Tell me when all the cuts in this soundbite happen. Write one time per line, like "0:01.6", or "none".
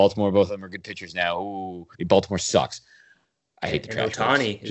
0:01.9